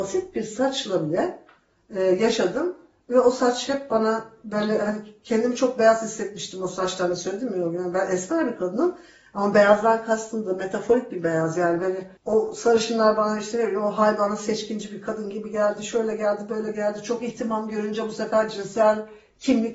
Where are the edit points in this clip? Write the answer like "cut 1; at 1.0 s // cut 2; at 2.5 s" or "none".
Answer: cut 1; at 12.2 s